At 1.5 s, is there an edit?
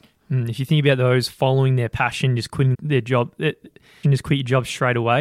no; 2 cuts; at 2.7 s, 4.0 s

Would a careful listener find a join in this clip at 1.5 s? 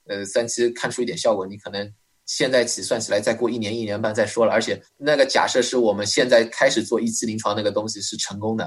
no; 1 cut; at 4.9 s

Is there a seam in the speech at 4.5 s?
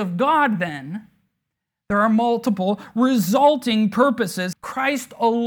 yes; 1 cut; at 4.5 s

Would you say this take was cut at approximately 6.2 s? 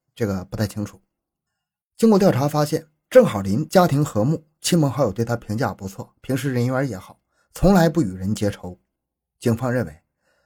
no; 0 cuts

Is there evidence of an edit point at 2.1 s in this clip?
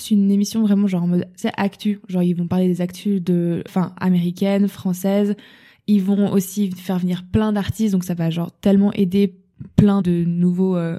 no; 2 cuts; at 3.7 s, 10.0 s

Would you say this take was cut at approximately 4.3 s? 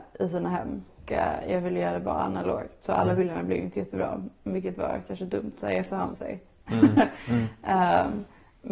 no; 1 cut; at 6.1 s

